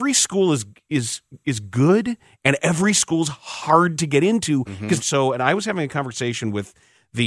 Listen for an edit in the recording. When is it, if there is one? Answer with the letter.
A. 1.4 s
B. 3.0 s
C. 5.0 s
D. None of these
C